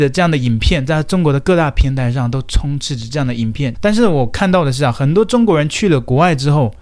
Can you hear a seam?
yes; 1 cut; at 3.7 s

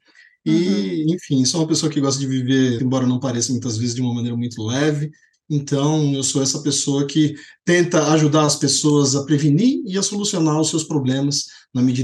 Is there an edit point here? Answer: yes; 2 cuts; at 2.8 s, 5.3 s

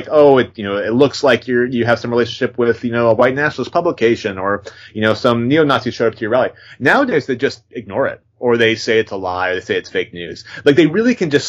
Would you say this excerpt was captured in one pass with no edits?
yes; 0 cuts

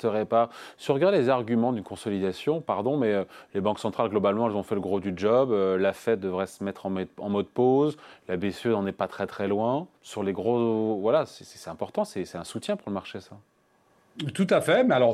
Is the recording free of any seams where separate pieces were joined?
no; 1 cut; at 10.0 s

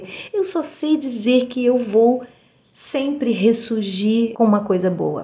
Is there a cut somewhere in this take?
yes; 1 cut; at 4.3 s

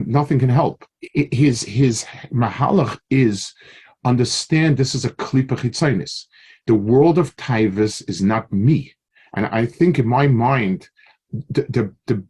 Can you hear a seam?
yes; 1 cut; at 0.9 s

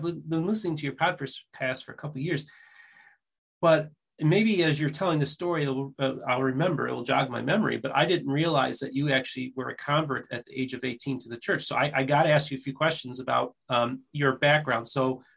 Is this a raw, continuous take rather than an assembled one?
yes; 0 cuts

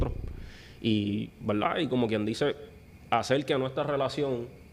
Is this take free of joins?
yes; 0 cuts

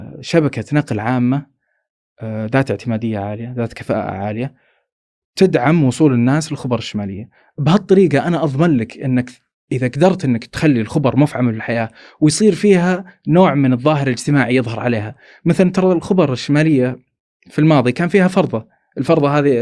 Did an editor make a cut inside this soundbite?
no; 0 cuts

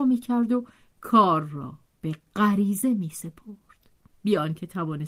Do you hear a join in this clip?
yes; 1 cut; at 4.1 s

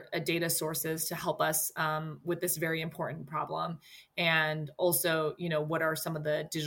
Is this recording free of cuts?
yes; 0 cuts

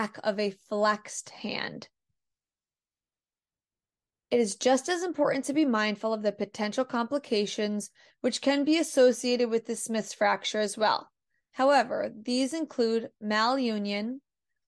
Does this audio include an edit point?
no; 0 cuts

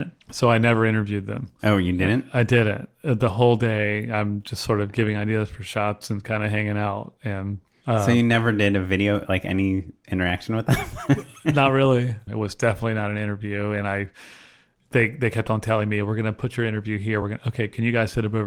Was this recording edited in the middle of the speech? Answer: yes; 2 cuts; at 12.3 s, 17.2 s

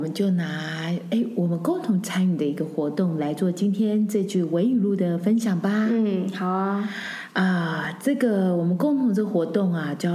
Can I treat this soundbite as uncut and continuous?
yes; 0 cuts

